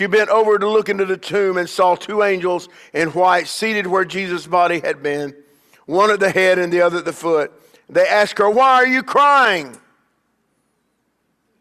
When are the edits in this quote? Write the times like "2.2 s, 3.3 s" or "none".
8.5 s